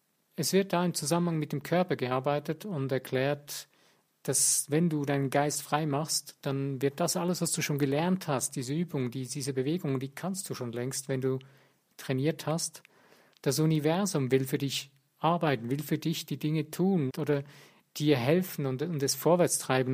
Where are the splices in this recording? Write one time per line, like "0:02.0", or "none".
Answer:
0:13.3
0:17.1